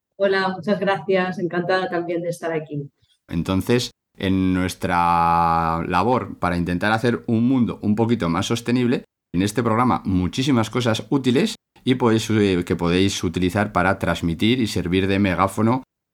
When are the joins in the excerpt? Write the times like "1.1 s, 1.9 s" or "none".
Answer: 3.3 s, 9.3 s